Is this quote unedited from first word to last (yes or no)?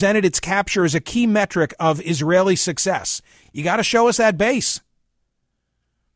yes